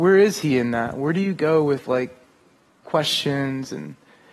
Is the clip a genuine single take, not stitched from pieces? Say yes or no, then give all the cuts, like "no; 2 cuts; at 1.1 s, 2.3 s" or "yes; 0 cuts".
yes; 0 cuts